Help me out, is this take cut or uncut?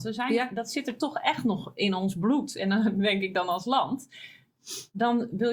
uncut